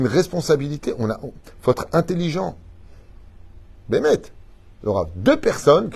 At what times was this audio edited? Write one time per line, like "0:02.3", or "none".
0:03.9